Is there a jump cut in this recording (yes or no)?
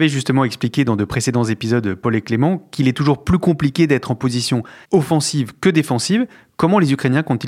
yes